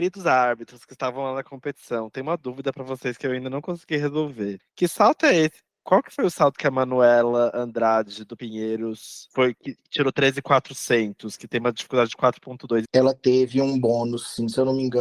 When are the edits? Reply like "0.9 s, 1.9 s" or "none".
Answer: 12.9 s

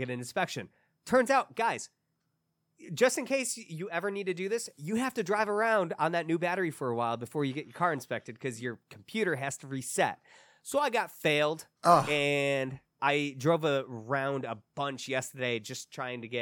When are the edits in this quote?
11.7 s, 13.0 s

